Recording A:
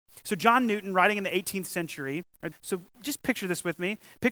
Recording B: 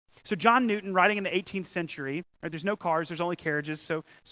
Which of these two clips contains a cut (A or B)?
A